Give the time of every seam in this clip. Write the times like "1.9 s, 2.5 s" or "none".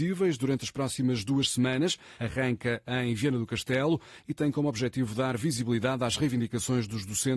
2.2 s